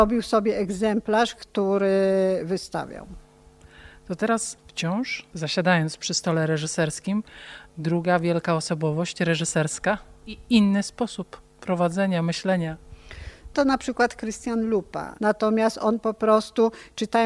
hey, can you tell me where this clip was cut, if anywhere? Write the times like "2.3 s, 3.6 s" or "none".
1.3 s, 15.2 s